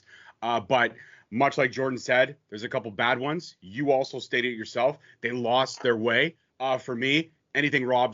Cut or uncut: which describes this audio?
uncut